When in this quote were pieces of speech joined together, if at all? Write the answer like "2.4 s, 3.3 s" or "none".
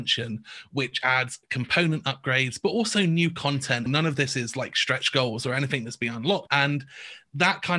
3.9 s, 6.5 s